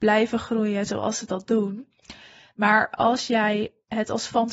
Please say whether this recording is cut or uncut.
uncut